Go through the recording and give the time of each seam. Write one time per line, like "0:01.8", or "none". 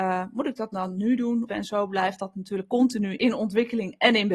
0:01.5
0:03.2

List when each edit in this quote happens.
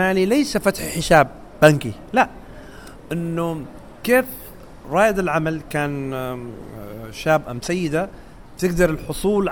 0:07.4

